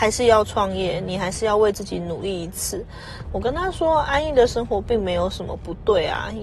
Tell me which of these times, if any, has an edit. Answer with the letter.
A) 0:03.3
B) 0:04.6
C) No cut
A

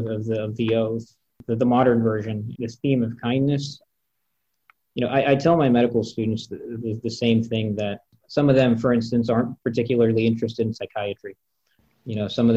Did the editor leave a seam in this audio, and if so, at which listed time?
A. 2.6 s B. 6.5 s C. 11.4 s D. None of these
A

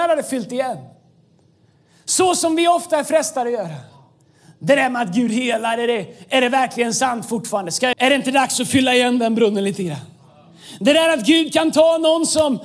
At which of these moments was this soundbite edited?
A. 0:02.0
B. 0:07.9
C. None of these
B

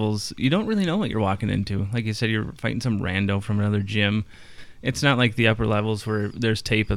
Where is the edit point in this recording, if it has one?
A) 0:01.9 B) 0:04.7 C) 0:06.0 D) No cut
D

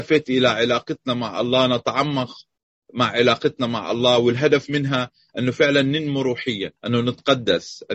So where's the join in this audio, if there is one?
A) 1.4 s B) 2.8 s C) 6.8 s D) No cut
C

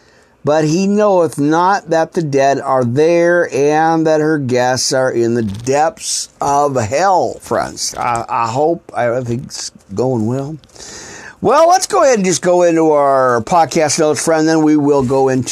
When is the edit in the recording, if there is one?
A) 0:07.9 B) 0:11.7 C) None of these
A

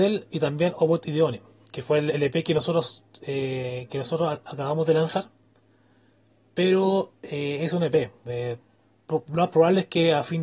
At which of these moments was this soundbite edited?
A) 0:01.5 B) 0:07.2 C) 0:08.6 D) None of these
D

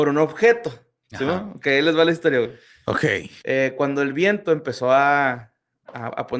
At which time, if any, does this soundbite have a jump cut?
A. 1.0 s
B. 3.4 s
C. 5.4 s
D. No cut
B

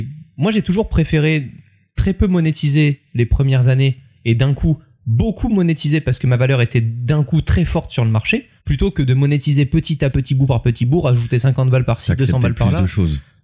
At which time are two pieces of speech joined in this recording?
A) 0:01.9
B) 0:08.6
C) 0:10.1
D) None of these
C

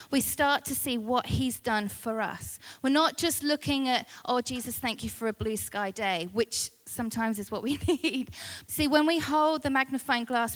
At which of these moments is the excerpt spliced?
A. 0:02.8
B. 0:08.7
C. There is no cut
B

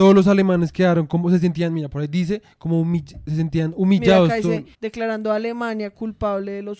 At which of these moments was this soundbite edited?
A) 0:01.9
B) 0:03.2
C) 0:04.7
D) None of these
C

